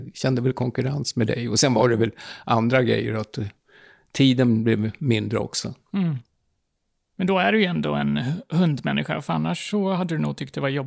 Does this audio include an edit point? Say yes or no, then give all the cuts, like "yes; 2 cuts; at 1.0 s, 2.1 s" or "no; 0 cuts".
no; 0 cuts